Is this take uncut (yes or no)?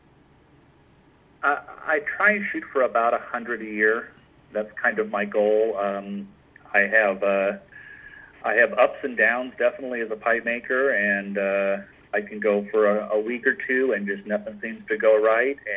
yes